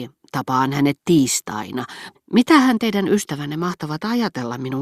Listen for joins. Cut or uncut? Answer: cut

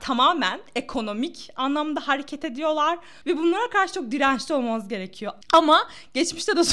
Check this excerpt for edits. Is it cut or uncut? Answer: cut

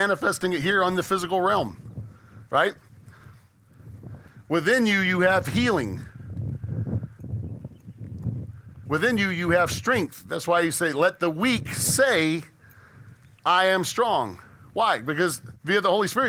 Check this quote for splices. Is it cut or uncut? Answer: cut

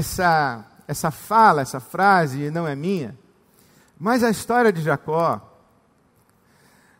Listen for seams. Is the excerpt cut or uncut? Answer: cut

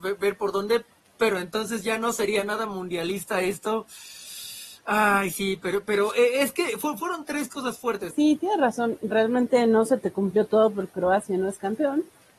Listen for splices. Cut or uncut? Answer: cut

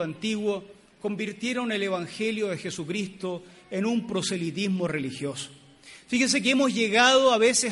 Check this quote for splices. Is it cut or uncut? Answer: uncut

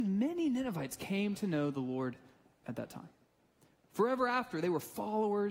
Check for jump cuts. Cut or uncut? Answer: uncut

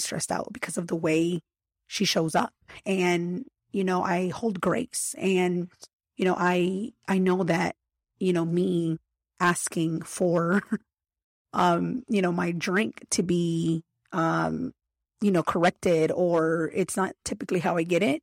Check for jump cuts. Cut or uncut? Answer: uncut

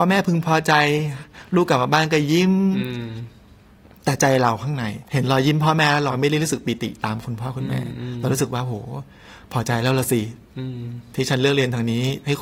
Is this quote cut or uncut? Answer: uncut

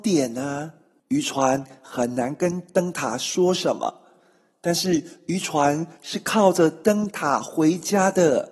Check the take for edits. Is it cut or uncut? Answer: cut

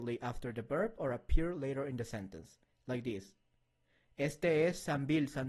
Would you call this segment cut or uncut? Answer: uncut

